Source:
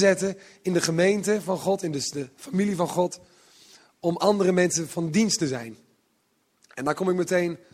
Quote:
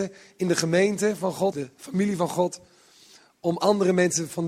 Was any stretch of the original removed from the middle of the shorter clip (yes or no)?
yes